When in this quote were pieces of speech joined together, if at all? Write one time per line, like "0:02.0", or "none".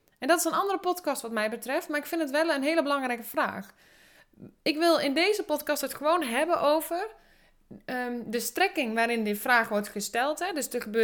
none